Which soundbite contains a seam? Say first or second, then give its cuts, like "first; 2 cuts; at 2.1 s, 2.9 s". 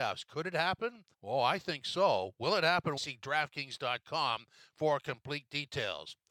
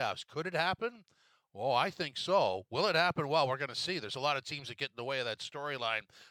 first; 2 cuts; at 1.1 s, 3.0 s